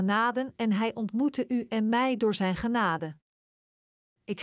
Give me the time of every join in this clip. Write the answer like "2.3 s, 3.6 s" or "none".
none

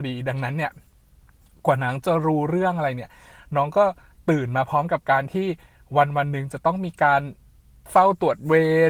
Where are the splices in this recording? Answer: none

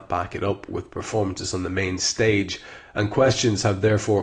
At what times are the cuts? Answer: none

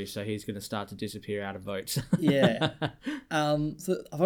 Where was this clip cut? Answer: none

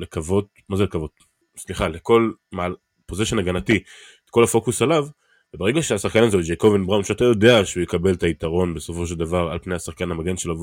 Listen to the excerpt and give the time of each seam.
1.4 s

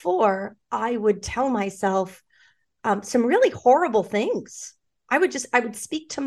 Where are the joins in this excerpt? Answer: none

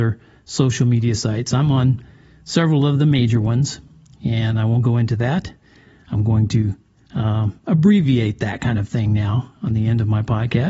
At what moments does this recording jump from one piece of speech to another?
none

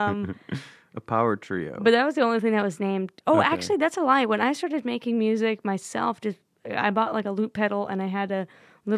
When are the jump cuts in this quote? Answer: none

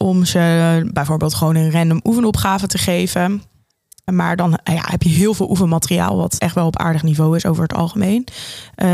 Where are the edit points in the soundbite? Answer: 4.1 s, 6.4 s

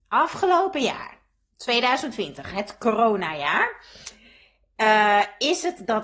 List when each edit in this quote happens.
none

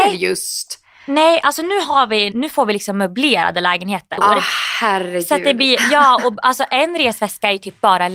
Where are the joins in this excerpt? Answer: 2.3 s, 4.2 s

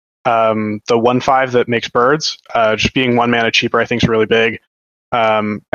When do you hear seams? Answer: none

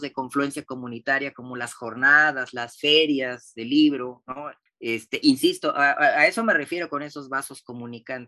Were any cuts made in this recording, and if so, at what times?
4.7 s

